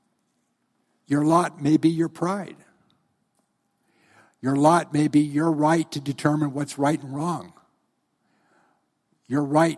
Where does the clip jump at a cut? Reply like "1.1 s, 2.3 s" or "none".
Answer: none